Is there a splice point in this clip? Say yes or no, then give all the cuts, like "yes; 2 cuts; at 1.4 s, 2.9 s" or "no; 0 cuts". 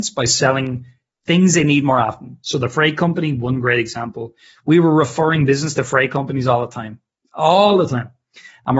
no; 0 cuts